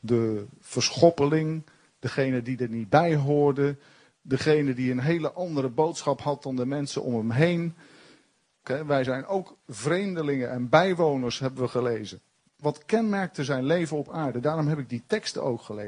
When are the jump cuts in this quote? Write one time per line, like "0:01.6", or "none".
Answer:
0:08.6
0:12.6